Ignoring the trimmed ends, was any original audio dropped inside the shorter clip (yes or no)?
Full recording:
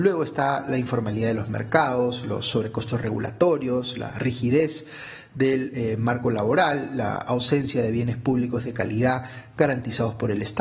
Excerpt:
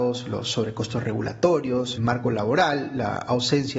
yes